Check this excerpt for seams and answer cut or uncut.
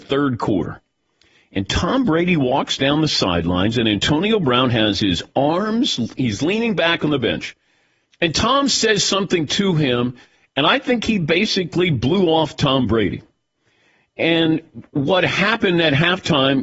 cut